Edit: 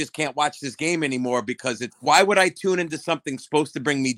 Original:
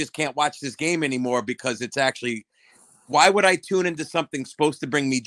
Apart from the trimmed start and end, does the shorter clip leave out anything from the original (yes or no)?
yes